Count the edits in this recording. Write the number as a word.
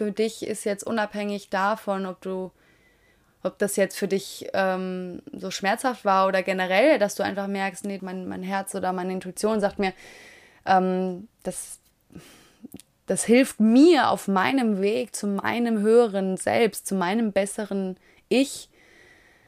one